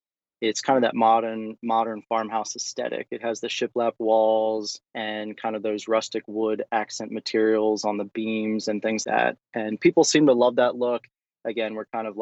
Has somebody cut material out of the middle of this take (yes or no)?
yes